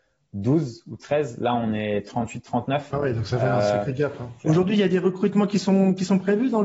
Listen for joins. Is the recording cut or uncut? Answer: cut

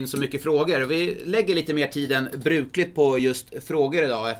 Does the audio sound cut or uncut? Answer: uncut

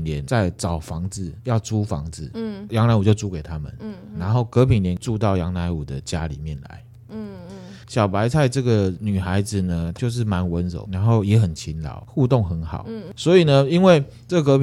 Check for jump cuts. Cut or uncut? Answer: uncut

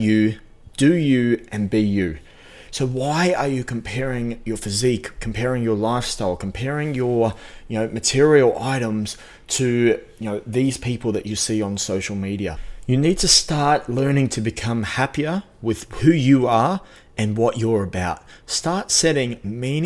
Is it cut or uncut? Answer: cut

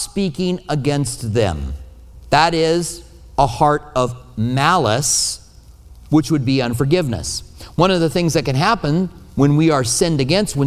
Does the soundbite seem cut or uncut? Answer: uncut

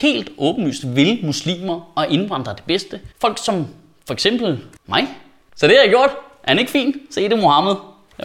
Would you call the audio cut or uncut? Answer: cut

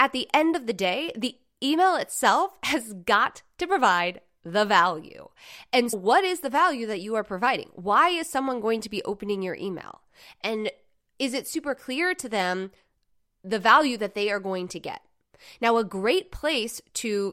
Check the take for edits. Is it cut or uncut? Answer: cut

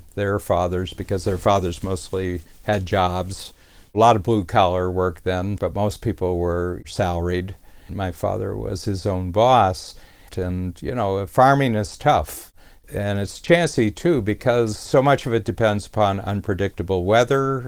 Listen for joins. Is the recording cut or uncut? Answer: cut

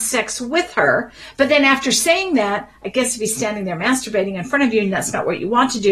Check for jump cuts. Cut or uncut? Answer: uncut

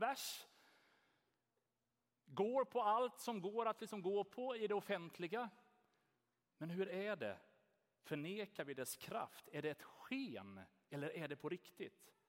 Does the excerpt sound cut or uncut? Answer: uncut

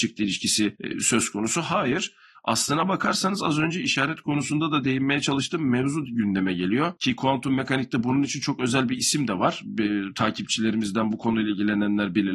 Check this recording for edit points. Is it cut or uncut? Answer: uncut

